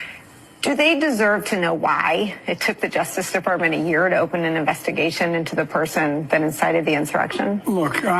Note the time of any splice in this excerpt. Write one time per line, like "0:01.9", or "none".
none